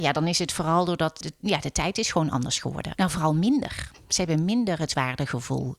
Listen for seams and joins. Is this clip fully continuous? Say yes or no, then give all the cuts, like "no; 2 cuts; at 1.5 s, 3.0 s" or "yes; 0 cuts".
no; 2 cuts; at 1.2 s, 2.9 s